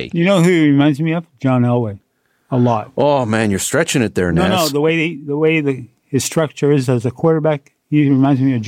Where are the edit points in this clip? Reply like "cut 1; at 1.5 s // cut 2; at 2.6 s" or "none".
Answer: none